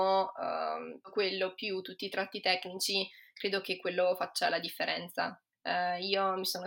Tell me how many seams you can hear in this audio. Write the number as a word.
two